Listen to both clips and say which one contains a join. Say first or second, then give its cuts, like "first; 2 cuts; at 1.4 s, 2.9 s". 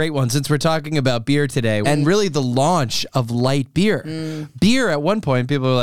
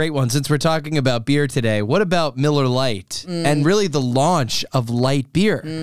first; 1 cut; at 1.8 s